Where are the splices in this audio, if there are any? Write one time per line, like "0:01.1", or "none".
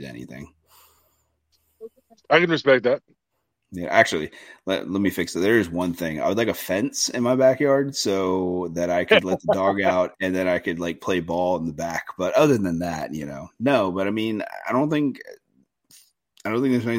none